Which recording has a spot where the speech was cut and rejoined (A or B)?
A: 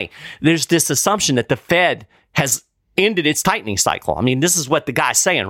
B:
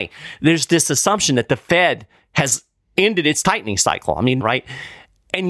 B